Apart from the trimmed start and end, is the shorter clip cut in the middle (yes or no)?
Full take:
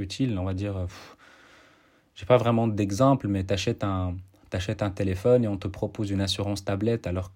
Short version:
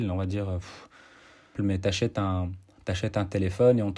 yes